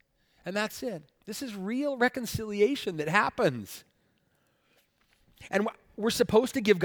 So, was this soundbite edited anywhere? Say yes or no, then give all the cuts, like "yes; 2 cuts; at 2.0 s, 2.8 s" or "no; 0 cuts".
no; 0 cuts